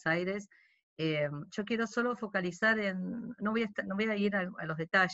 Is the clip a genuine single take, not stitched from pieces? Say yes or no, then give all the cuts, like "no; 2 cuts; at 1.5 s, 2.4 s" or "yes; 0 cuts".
yes; 0 cuts